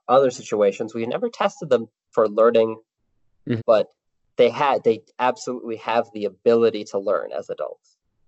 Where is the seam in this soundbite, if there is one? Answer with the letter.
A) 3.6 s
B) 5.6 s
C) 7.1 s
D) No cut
A